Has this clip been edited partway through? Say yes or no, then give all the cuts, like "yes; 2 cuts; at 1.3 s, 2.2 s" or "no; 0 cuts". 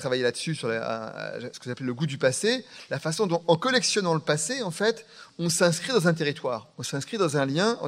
no; 0 cuts